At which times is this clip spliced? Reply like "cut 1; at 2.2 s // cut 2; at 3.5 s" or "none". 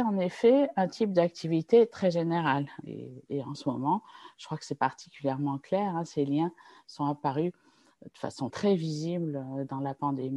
cut 1; at 2.8 s // cut 2; at 8.5 s